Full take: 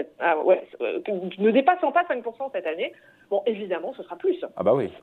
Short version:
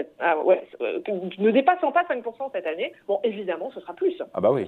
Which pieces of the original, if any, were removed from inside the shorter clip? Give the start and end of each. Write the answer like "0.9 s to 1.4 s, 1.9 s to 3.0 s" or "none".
3.0 s to 3.2 s